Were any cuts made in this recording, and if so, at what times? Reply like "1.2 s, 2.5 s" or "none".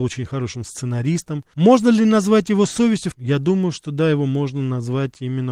1.5 s, 3.1 s